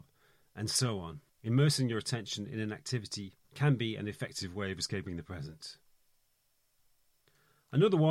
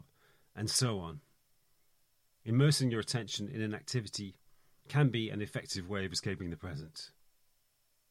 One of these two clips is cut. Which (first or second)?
first